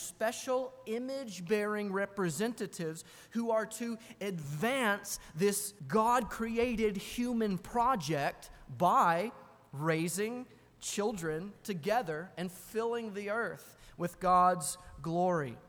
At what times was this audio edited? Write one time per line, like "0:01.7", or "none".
0:05.8